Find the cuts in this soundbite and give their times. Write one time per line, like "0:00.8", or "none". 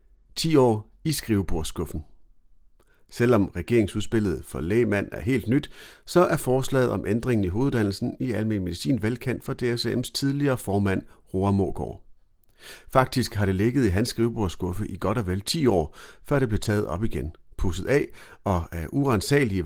none